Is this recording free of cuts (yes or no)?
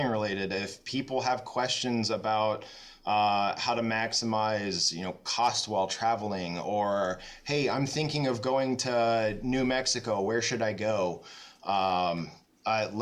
yes